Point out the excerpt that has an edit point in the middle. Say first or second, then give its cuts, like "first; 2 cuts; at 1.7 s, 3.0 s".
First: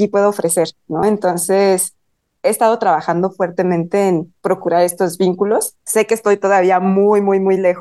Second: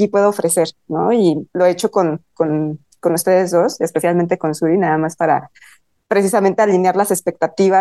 first; 2 cuts; at 1.0 s, 5.8 s